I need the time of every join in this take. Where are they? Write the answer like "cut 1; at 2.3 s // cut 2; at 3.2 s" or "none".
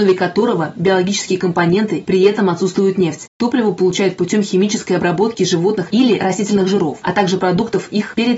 cut 1; at 3.3 s